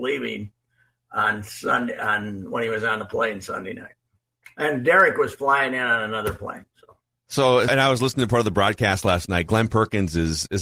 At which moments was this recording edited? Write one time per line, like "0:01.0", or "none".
0:07.7